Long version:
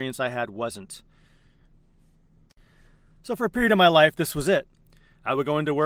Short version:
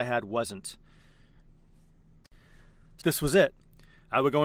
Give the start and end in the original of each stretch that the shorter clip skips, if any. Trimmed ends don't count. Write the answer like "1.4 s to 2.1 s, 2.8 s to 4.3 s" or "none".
3.3 s to 4.1 s